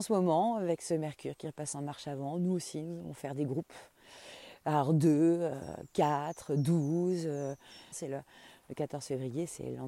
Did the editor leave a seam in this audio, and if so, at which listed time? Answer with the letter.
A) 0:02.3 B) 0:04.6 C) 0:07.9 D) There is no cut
C